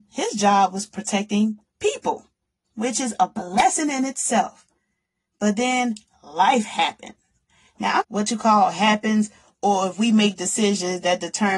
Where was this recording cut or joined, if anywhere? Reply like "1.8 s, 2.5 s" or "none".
8.0 s